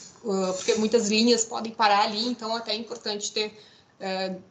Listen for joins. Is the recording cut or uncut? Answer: uncut